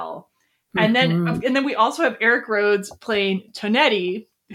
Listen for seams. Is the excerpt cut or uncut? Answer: uncut